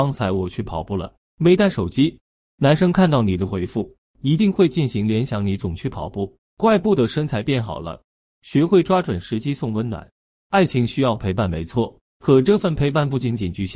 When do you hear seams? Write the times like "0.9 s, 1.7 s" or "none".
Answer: none

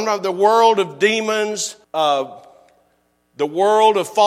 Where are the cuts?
1.8 s

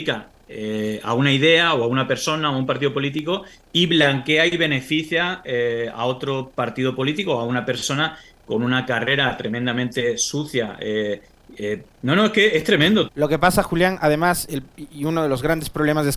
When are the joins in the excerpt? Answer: 11.9 s, 13.1 s

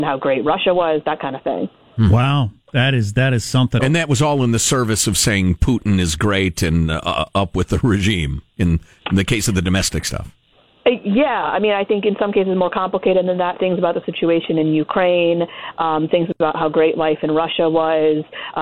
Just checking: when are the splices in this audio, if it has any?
3.8 s

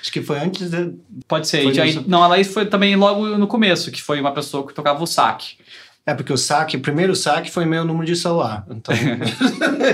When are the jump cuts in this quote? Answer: 1.2 s

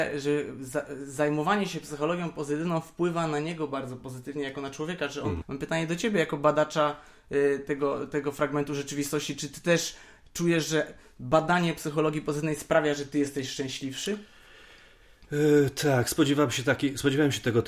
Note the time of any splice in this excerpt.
5.4 s

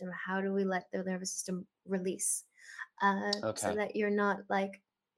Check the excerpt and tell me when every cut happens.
none

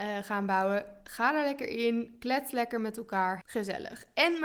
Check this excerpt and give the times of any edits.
3.4 s

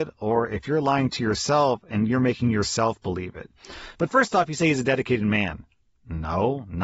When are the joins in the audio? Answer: none

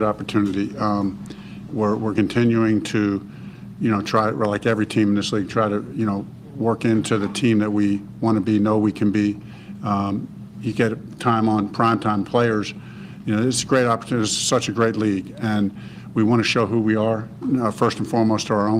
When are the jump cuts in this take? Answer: 1.7 s

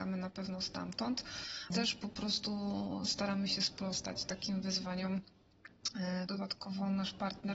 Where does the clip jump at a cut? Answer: 1.7 s, 6.3 s

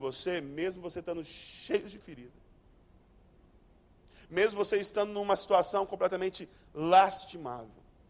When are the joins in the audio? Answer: none

